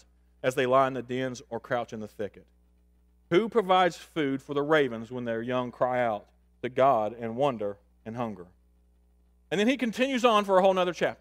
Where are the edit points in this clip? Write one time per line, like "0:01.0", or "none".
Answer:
none